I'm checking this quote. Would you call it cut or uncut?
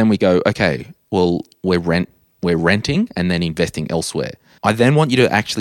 cut